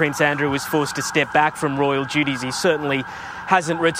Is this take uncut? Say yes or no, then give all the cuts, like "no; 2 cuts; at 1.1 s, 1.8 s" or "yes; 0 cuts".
yes; 0 cuts